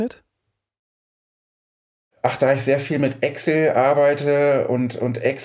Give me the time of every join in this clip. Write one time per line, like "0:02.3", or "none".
none